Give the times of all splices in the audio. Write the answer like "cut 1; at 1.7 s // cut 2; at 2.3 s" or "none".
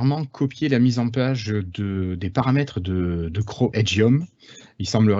cut 1; at 3.7 s

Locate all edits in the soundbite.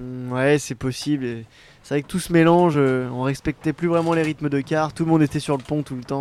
none

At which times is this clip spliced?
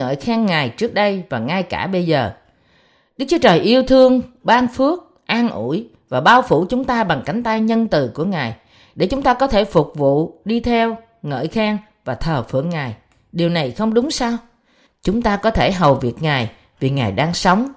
cut 1; at 14.9 s

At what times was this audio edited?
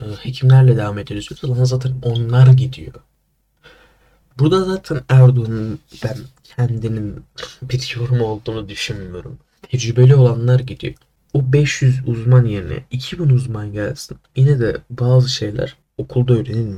cut 1; at 9.6 s

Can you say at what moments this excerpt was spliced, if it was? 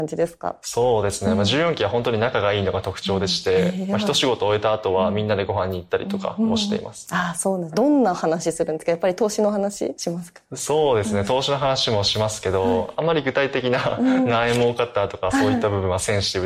none

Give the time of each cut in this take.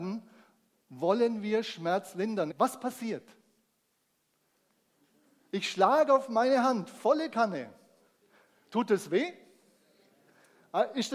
cut 1; at 2.5 s

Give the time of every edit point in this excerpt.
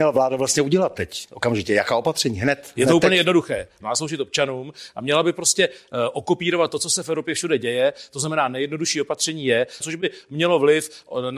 cut 1; at 3.8 s // cut 2; at 9.8 s

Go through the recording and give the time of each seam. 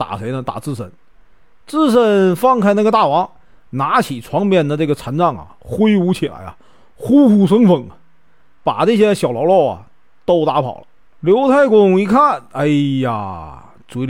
none

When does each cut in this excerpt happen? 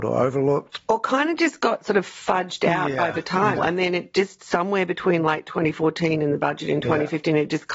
cut 1; at 3.6 s

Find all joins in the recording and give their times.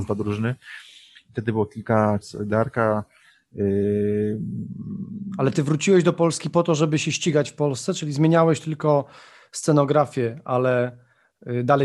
cut 1; at 2.2 s

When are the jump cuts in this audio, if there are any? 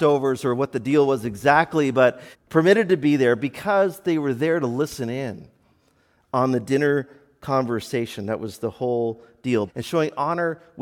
cut 1; at 2.3 s // cut 2; at 9.7 s

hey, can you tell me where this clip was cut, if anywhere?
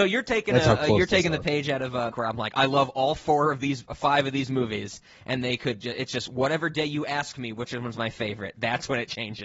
cut 1; at 2.1 s

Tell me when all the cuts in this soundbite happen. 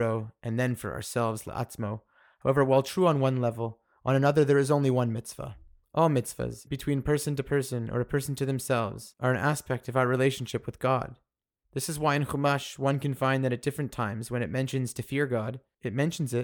cut 1; at 6.7 s

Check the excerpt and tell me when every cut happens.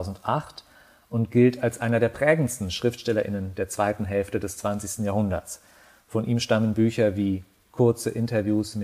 none

